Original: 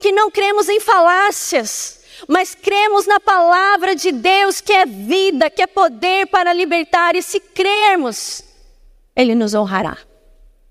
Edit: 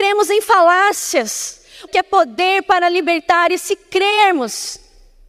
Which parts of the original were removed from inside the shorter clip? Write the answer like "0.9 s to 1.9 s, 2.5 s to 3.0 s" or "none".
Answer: 2.3 s to 5.5 s